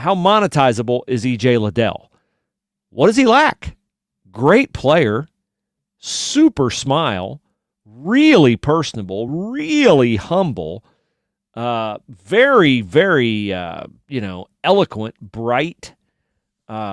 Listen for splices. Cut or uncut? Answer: uncut